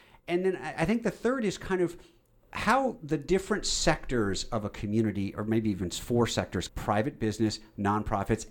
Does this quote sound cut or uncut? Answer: cut